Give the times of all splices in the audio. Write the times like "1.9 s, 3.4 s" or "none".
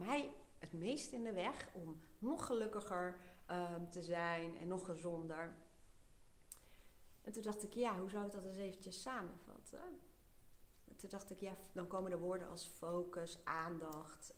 none